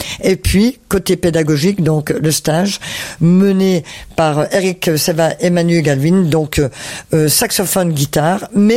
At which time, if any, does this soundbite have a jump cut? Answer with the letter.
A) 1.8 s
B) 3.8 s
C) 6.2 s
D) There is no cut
D